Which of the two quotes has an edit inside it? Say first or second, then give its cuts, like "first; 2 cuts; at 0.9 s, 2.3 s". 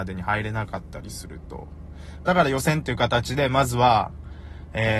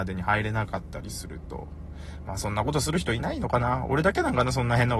first; 1 cut; at 2.3 s